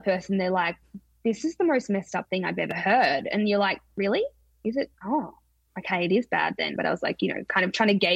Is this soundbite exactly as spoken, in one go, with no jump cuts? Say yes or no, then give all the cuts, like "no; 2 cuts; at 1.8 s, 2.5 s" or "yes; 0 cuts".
no; 2 cuts; at 4.9 s, 6.8 s